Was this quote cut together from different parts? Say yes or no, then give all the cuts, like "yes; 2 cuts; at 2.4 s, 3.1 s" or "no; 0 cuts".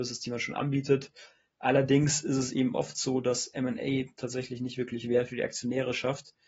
no; 0 cuts